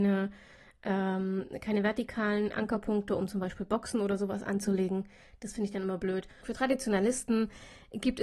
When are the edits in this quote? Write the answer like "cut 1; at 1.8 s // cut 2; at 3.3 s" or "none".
cut 1; at 6.4 s